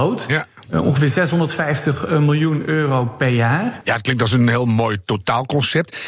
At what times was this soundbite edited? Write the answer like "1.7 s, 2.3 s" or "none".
3.8 s